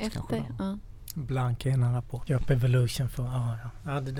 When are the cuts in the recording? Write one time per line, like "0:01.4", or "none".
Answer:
0:02.3